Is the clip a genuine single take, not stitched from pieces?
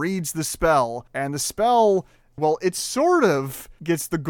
no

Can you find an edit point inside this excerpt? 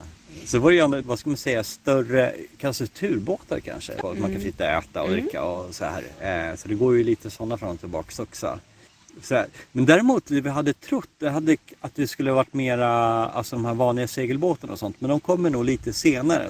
yes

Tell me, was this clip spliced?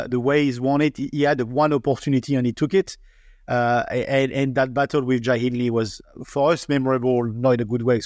no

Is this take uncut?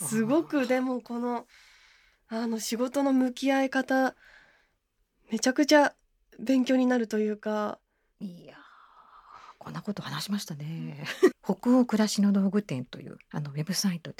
no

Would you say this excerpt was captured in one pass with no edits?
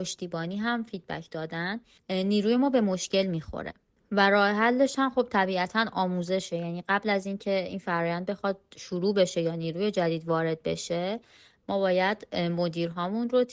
yes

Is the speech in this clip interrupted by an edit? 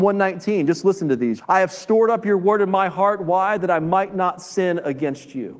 yes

